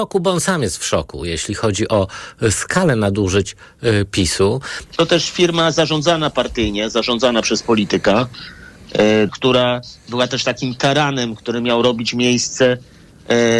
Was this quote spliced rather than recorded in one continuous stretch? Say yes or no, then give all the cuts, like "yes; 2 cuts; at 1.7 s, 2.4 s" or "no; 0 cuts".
yes; 2 cuts; at 4.9 s, 9.3 s